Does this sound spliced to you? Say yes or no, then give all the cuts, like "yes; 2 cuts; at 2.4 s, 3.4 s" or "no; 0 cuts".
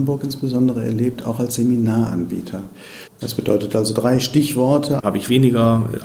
yes; 2 cuts; at 3.1 s, 5.0 s